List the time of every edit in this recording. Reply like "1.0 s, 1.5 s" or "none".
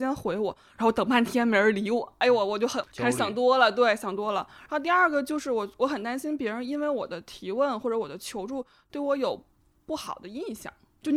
none